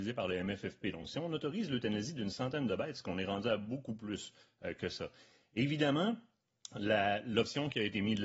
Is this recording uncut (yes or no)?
yes